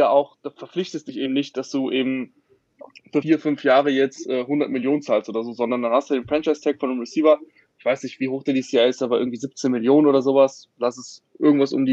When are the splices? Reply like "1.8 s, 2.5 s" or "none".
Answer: none

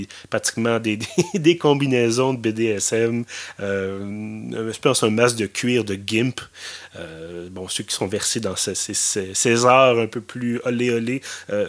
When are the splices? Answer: none

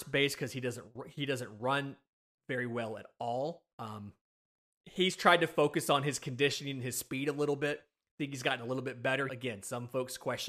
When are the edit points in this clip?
3.7 s, 9.3 s

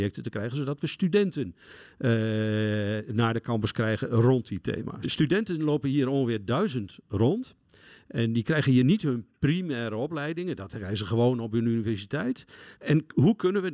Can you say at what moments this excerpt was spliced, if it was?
5.0 s, 12.7 s

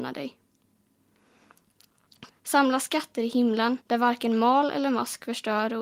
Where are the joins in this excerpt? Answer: 2.3 s, 3.8 s

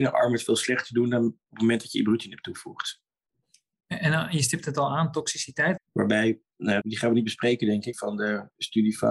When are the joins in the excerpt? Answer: 5.8 s, 6.8 s, 7.9 s

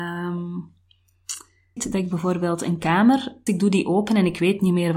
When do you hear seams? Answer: 1.8 s, 3.5 s

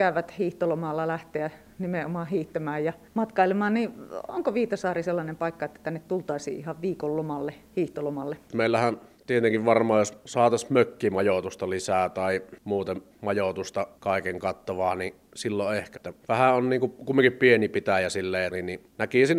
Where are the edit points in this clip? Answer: 15.9 s, 18.5 s

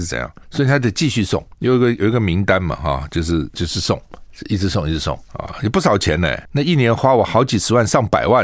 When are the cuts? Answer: none

